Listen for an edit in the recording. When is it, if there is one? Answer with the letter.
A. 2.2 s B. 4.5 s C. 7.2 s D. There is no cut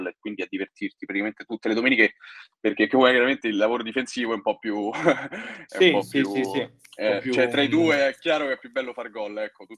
D